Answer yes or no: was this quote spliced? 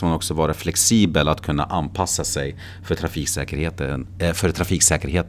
no